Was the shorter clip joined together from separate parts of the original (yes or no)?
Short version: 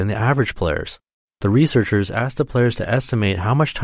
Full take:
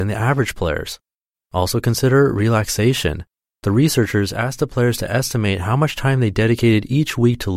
yes